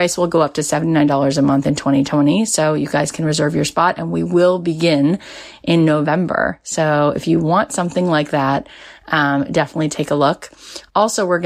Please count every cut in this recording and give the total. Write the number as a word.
zero